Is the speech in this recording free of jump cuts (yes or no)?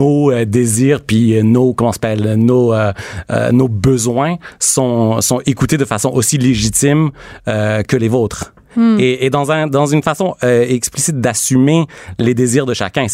yes